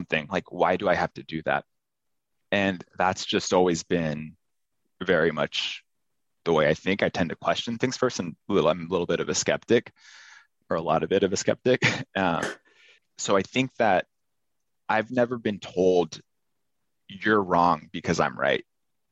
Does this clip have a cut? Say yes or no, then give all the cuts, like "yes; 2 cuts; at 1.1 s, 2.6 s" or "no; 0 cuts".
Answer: no; 0 cuts